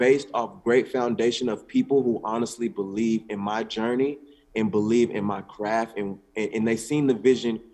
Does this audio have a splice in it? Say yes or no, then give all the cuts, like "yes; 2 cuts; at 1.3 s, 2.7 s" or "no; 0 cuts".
no; 0 cuts